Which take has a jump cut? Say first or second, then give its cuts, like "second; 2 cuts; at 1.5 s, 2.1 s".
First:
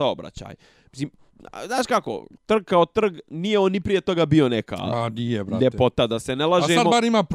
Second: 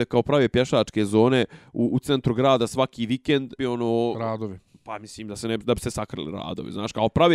second; 1 cut; at 3.6 s